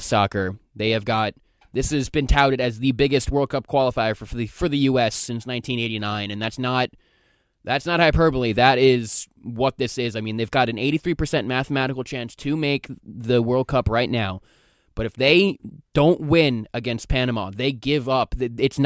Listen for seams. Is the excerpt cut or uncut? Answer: uncut